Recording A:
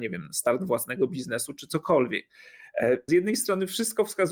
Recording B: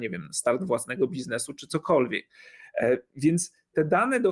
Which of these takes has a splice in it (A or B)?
A